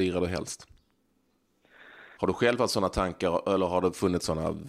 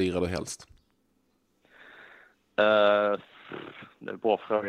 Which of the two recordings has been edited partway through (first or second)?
first